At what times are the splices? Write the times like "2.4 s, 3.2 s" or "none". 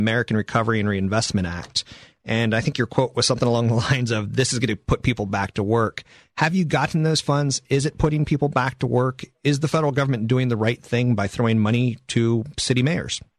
none